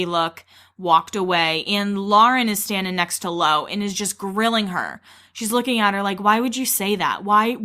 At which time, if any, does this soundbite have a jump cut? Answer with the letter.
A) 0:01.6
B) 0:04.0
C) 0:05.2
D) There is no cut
D